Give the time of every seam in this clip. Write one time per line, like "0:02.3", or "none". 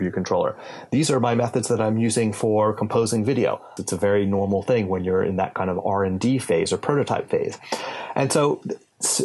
0:03.8